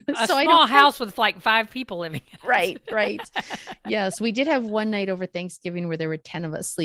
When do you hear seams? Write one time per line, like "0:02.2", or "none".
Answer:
none